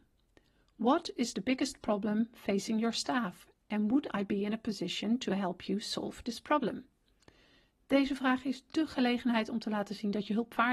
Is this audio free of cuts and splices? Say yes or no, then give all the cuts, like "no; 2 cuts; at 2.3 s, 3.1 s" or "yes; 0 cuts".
yes; 0 cuts